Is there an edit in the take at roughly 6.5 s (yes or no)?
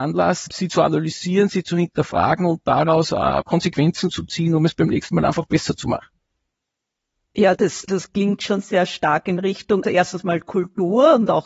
no